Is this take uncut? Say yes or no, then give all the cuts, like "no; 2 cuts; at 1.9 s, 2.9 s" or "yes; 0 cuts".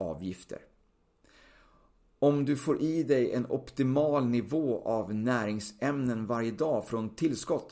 yes; 0 cuts